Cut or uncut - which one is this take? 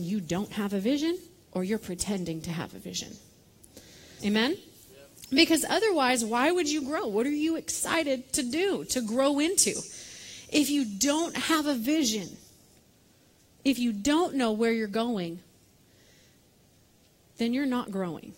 cut